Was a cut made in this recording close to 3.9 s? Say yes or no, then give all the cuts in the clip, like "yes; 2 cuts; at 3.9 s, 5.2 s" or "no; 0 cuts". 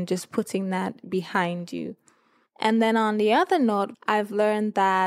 yes; 1 cut; at 3.9 s